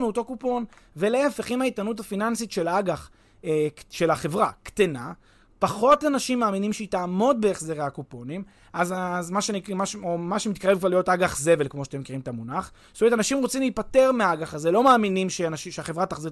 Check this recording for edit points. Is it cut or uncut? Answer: uncut